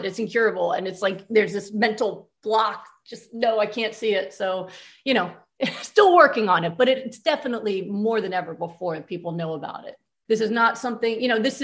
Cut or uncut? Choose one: cut